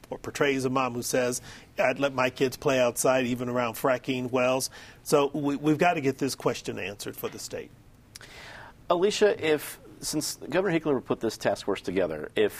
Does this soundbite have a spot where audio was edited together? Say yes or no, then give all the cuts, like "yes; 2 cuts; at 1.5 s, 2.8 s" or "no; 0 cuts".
no; 0 cuts